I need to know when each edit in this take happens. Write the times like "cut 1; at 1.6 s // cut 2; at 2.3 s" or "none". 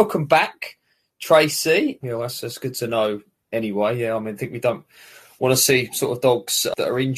cut 1; at 2.0 s